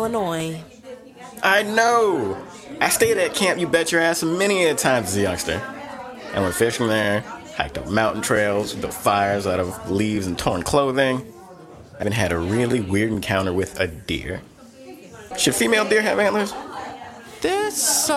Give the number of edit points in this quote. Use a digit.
2